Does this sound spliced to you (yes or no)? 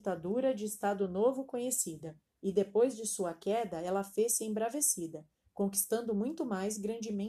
no